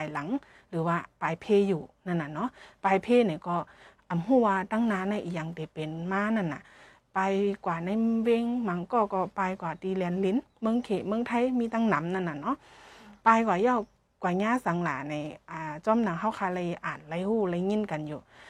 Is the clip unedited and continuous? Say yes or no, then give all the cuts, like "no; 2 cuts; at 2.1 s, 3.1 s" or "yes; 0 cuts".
yes; 0 cuts